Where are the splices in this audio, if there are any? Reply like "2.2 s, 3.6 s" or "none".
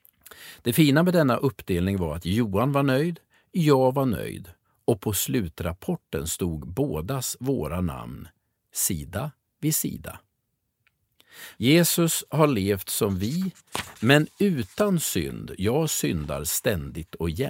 11.6 s